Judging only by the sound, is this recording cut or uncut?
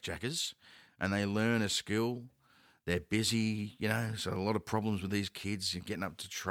uncut